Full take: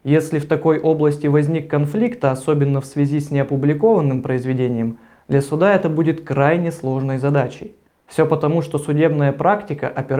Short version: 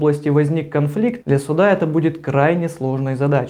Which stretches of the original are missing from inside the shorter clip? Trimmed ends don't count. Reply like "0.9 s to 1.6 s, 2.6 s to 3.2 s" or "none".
2.2 s to 5.2 s